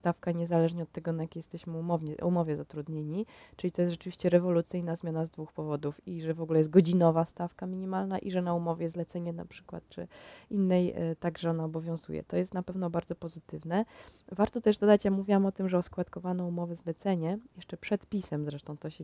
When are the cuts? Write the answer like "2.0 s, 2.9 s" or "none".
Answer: none